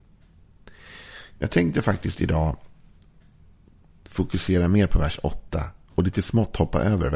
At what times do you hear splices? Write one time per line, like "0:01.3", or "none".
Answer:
none